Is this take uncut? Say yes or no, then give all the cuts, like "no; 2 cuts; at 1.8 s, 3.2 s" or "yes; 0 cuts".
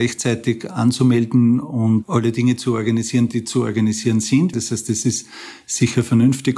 no; 1 cut; at 4.5 s